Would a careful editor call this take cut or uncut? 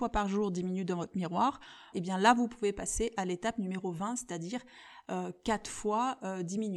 cut